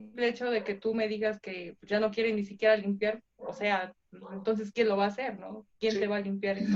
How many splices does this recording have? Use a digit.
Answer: 0